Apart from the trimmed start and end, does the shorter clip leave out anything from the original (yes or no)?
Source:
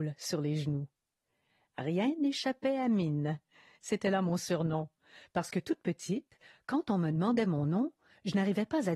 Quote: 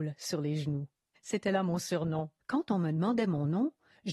yes